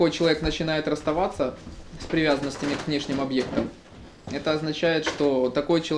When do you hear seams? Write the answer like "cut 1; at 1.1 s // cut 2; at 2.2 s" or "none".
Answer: none